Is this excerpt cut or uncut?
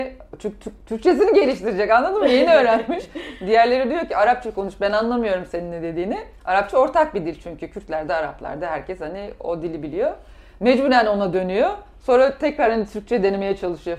uncut